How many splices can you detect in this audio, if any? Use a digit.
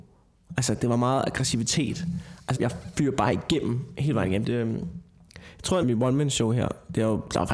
3